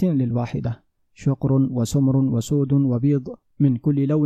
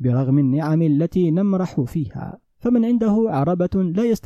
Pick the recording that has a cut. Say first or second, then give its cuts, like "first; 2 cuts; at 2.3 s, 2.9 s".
second; 1 cut; at 2.5 s